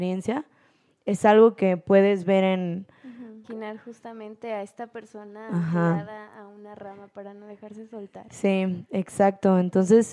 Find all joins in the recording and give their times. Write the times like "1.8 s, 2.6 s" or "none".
3.4 s